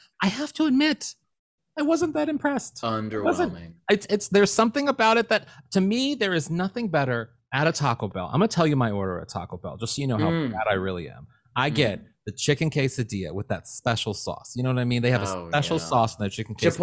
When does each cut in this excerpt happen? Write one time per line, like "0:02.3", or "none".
none